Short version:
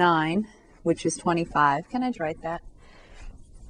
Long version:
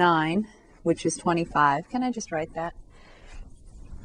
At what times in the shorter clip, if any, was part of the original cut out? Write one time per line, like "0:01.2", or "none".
0:02.1